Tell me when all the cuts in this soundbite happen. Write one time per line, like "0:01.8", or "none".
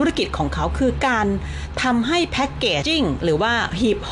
0:02.8